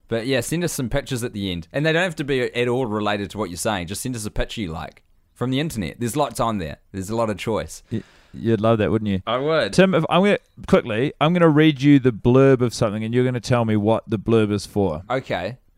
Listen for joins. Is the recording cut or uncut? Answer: cut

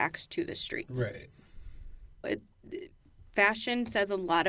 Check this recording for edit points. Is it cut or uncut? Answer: cut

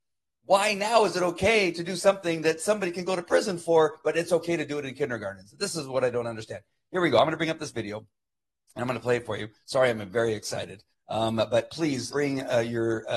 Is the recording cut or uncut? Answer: cut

